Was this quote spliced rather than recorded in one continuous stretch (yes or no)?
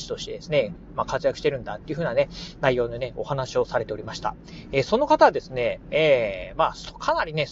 no